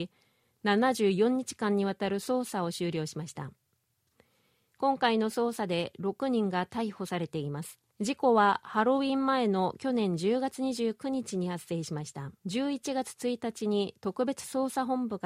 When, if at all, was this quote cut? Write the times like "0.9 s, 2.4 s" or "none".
7.9 s, 12.4 s